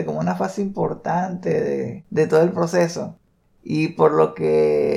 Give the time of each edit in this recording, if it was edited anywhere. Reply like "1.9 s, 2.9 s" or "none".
none